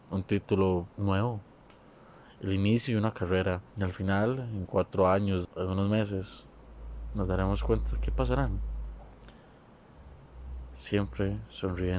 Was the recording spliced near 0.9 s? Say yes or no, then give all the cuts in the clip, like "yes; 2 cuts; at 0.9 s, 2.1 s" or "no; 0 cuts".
yes; 3 cuts; at 0.9 s, 3.7 s, 5.4 s